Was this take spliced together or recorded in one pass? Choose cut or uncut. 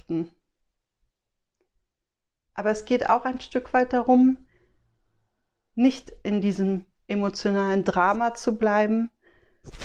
cut